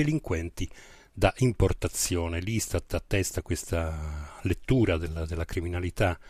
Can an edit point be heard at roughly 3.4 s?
yes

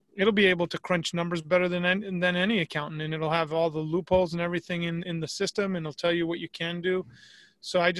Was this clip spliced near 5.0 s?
no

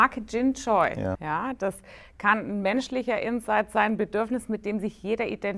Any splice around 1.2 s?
yes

